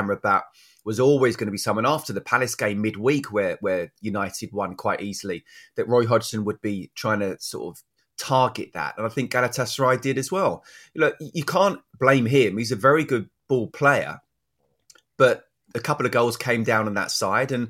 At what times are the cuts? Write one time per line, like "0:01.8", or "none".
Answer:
none